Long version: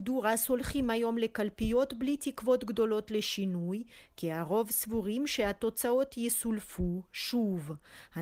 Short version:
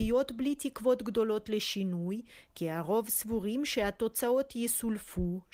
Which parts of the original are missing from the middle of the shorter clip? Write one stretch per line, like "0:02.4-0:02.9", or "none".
none